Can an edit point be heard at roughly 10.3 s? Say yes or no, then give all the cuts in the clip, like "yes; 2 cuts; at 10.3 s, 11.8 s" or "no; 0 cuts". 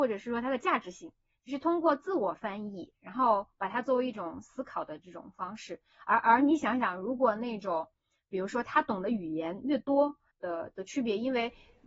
yes; 1 cut; at 10.3 s